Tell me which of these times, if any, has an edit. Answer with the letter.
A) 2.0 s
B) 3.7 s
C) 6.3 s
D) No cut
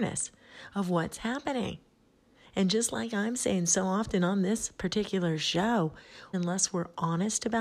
C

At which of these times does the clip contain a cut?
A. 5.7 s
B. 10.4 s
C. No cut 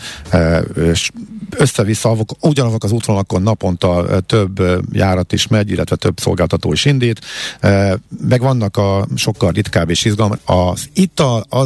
B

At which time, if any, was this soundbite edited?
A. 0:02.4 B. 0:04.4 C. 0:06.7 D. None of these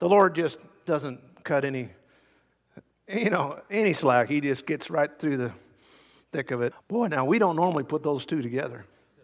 C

